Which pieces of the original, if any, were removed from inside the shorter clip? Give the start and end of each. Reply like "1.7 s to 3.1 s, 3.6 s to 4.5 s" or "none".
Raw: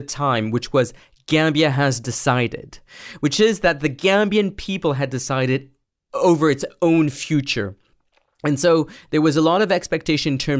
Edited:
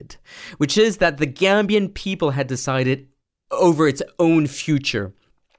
none